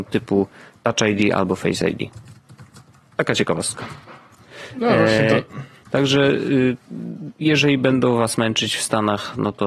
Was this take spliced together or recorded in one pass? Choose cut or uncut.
cut